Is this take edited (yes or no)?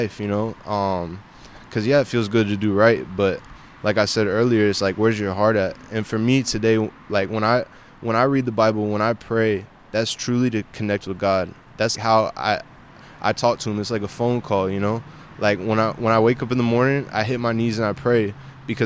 yes